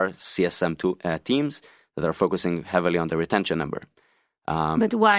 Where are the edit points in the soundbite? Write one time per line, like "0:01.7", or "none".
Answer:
none